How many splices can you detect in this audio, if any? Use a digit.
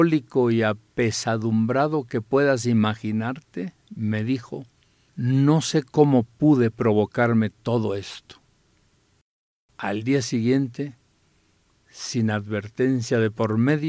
1